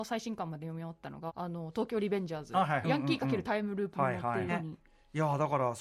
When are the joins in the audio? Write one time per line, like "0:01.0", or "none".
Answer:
0:01.3
0:02.8
0:04.5

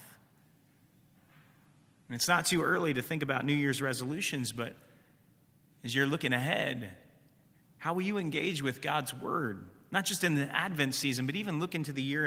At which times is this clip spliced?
none

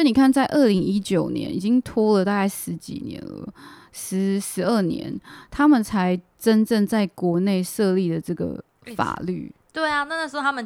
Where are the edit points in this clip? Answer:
none

